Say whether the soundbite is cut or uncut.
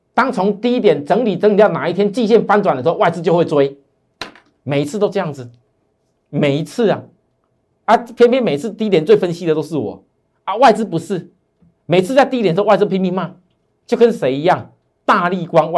uncut